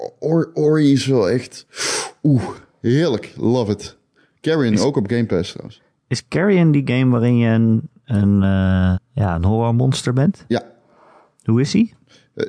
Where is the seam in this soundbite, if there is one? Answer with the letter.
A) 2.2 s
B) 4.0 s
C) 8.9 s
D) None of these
C